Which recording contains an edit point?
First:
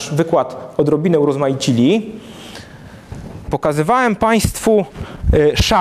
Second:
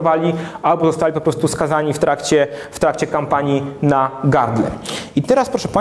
first; 1 cut; at 3.5 s

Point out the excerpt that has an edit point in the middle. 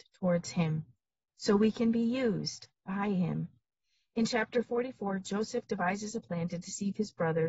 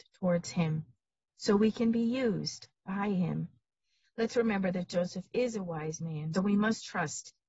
second; 2 cuts; at 4.0 s, 6.3 s

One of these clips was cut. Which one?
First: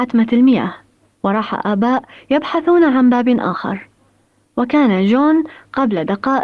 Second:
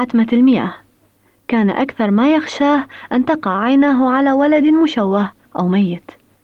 first; 1 cut; at 1.1 s

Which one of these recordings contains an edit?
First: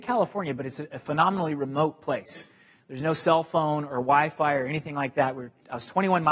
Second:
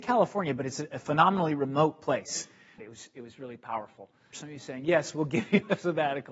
second; 2 cuts; at 2.8 s, 4.3 s

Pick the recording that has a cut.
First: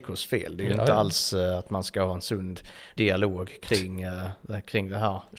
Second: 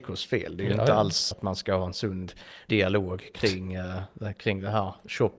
second; 1 cut; at 1.3 s

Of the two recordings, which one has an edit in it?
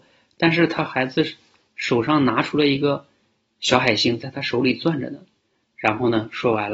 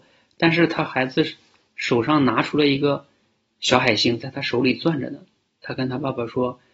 first; 1 cut; at 5.4 s

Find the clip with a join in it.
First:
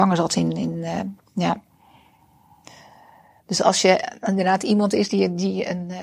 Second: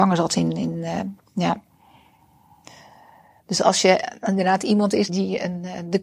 second; 1 cut; at 5.1 s

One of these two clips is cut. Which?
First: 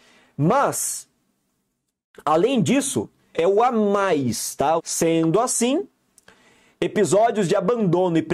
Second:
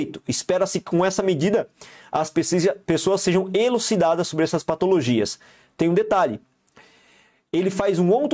first; 2 cuts; at 3.3 s, 4.8 s

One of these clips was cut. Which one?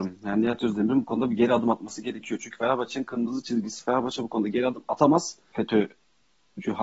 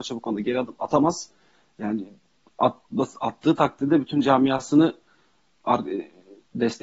first; 1 cut; at 5.5 s

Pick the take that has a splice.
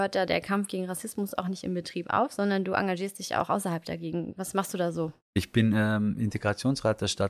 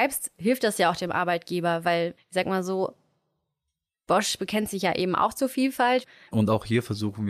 second; 2 cuts; at 2.2 s, 6.3 s

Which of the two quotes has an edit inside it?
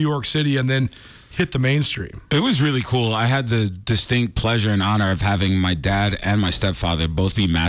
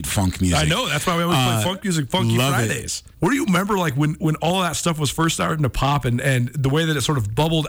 second; 1 cut; at 3.1 s

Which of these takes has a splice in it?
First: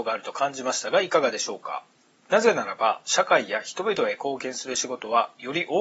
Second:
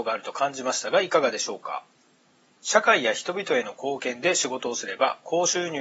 first; 1 cut; at 2.1 s

